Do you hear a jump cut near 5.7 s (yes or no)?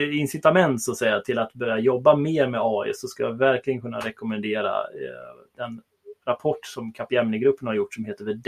no